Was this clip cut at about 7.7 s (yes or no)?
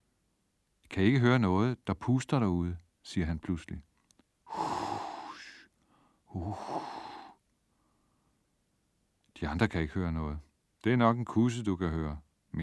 no